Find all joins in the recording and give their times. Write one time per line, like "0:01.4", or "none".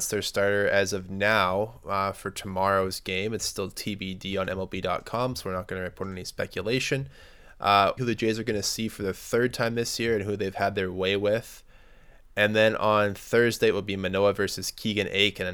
0:08.0